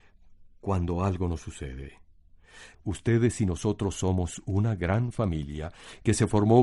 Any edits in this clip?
yes; 1 cut; at 2.7 s

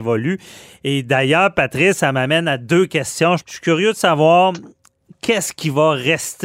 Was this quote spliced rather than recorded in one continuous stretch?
yes; 1 cut; at 3.4 s

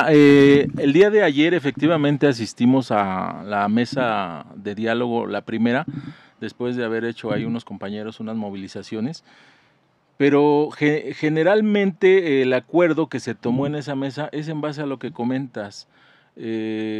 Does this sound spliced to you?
no; 0 cuts

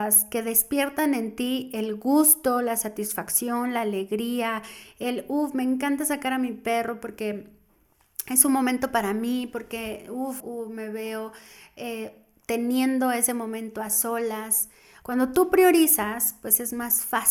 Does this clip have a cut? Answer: yes; 2 cuts; at 10.4 s, 15.0 s

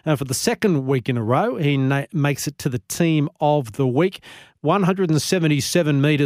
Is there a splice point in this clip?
no; 0 cuts

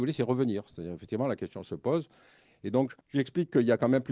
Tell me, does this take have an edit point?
yes; 1 cut; at 3.0 s

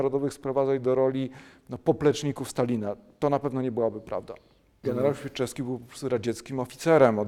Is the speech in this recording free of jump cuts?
no; 1 cut; at 4.8 s

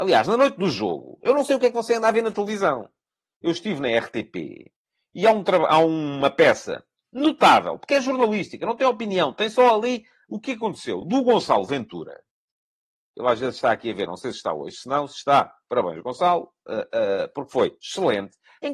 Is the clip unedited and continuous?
yes; 0 cuts

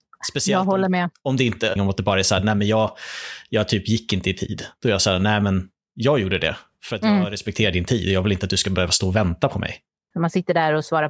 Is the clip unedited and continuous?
no; 2 cuts; at 1.8 s, 10.1 s

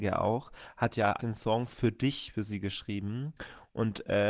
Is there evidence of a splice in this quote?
yes; 1 cut; at 1.2 s

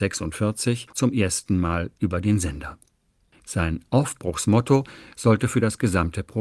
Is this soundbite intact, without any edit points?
yes; 0 cuts

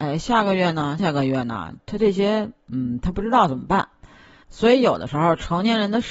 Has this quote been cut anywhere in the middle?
yes; 2 cuts; at 1.0 s, 4.4 s

